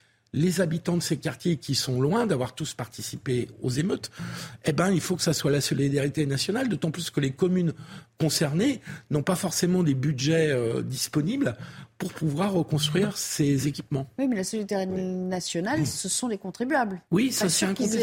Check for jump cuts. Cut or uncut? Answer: cut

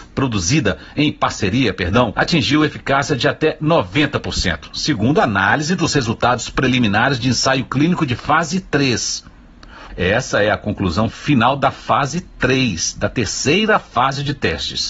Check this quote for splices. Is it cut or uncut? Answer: cut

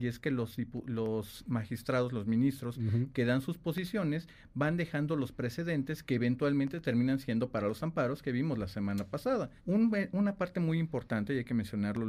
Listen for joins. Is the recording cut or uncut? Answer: cut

